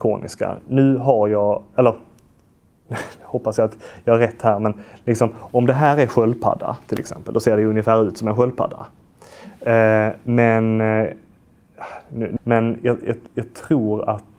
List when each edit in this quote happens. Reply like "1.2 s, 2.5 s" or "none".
12.4 s

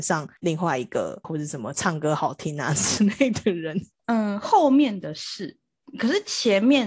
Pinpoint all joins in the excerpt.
1.2 s

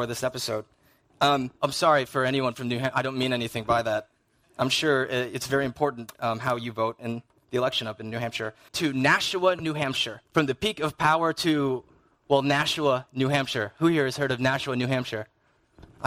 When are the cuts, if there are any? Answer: 8.7 s, 10.3 s

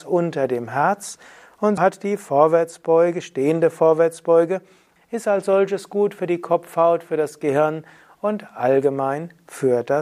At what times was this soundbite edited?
1.8 s, 5.0 s

